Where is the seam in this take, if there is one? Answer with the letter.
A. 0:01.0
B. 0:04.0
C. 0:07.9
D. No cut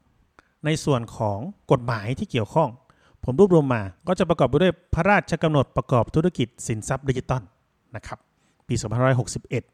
B